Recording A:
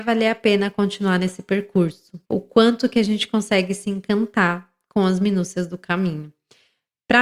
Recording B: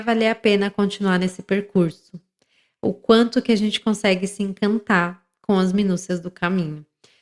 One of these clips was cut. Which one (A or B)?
A